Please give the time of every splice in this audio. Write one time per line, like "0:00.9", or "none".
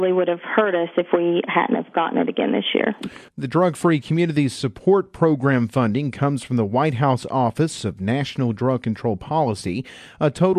none